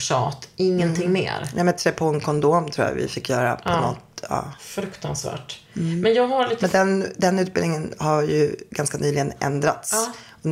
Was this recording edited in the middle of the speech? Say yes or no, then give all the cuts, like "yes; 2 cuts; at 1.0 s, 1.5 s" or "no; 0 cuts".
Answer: no; 0 cuts